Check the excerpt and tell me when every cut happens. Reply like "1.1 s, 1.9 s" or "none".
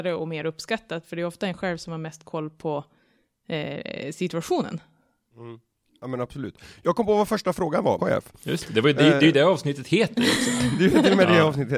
8.0 s